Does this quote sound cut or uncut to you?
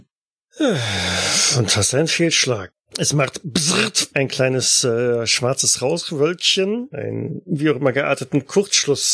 cut